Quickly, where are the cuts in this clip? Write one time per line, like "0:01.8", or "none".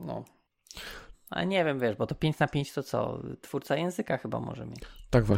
0:01.1

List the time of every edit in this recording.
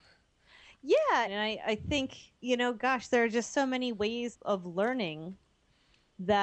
0:01.3
0:02.4
0:04.3

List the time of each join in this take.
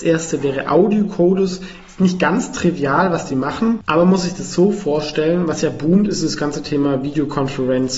none

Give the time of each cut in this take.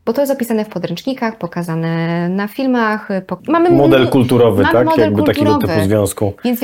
0:03.4

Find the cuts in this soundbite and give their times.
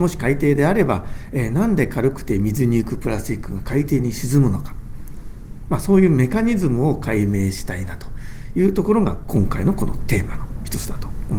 none

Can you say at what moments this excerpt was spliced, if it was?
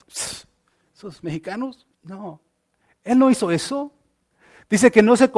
0:01.9

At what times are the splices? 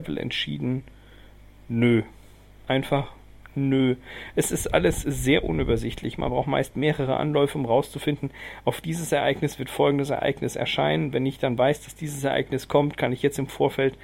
none

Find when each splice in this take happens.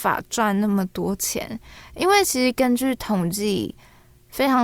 none

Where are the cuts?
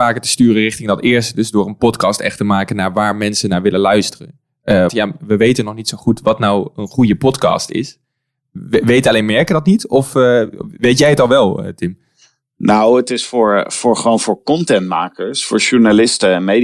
0:04.9

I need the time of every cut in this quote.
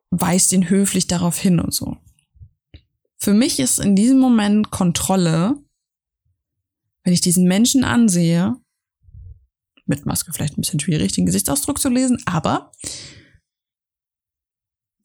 none

